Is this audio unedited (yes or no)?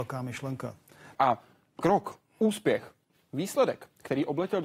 no